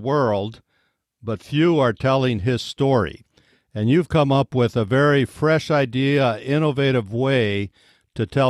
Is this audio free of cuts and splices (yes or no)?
yes